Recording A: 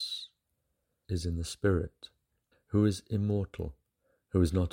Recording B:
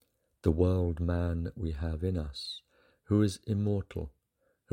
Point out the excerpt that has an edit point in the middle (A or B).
A